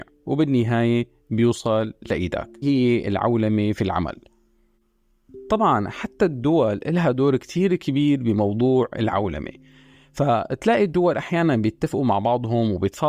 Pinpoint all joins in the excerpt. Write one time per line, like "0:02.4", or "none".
0:02.6

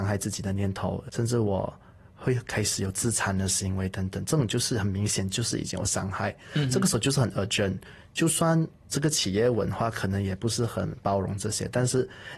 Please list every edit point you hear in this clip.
0:01.1

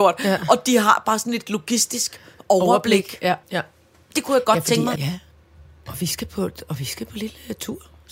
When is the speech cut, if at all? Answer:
0:03.4
0:05.0

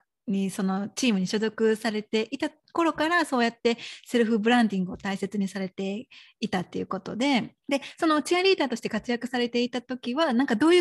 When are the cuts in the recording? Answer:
0:07.6

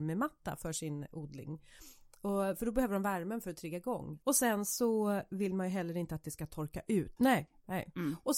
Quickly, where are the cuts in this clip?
0:04.2
0:07.2

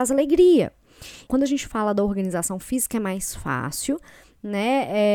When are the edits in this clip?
0:01.3

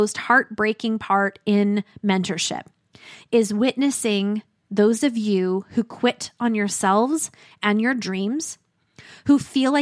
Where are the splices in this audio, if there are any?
none

